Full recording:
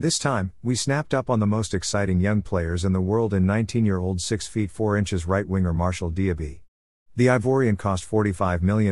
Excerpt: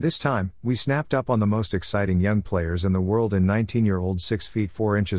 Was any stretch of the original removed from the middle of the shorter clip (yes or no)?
no